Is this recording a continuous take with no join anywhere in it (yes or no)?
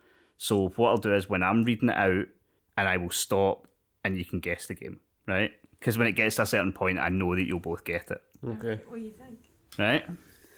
no